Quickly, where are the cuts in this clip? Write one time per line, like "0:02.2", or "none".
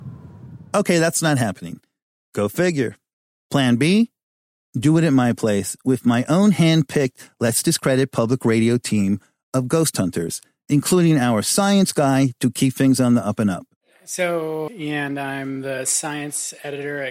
0:02.2
0:14.7